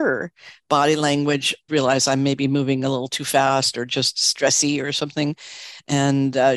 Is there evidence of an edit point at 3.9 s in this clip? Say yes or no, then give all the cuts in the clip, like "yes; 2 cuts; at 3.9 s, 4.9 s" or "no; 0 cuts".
no; 1 cut; at 1.7 s